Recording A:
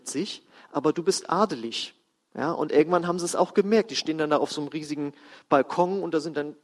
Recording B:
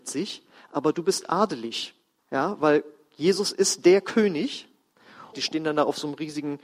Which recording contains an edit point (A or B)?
B